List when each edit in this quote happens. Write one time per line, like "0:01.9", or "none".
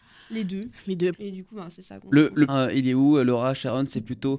0:01.1
0:02.5